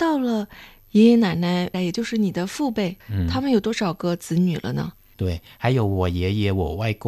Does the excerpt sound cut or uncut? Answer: cut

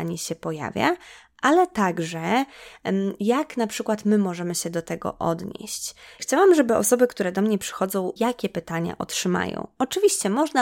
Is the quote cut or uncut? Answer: cut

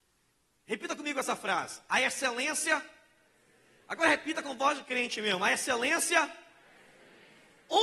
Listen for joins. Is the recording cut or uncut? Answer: uncut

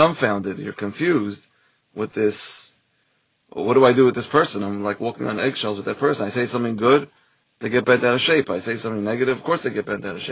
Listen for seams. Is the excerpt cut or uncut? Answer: uncut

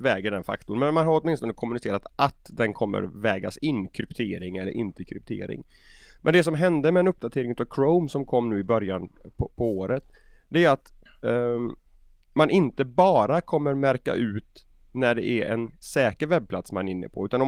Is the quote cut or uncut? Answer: uncut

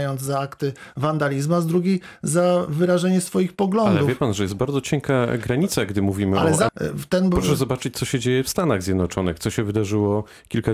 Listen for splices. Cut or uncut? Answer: cut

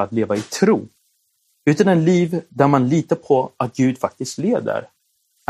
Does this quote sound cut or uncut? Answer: cut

